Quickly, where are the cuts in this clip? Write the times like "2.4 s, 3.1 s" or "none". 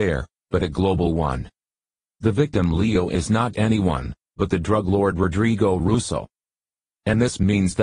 3.5 s